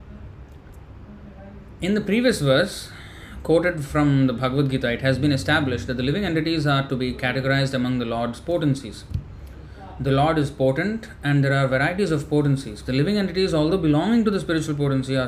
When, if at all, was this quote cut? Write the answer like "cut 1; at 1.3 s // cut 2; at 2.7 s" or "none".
cut 1; at 12.8 s